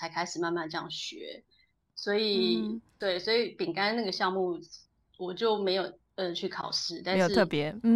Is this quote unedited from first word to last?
yes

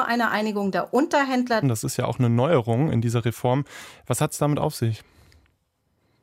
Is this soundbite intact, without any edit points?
no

